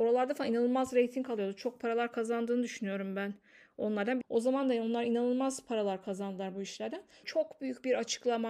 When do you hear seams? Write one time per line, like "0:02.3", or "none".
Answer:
0:04.2
0:07.2